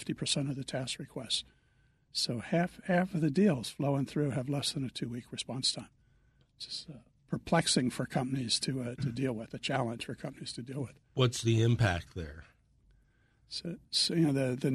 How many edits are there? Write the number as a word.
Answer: zero